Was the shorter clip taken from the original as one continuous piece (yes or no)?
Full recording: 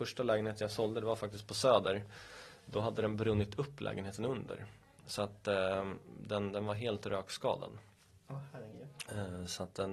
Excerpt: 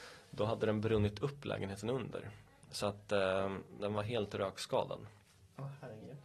no